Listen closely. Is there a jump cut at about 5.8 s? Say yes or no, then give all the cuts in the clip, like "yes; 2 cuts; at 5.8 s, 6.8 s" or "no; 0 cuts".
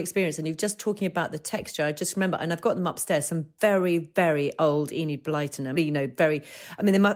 yes; 1 cut; at 5.8 s